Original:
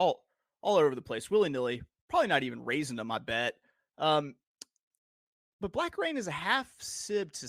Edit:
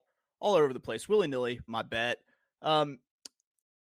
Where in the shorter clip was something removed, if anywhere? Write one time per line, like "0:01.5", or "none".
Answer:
0:01.7